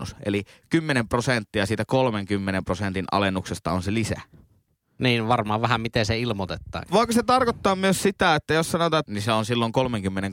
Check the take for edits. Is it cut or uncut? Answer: cut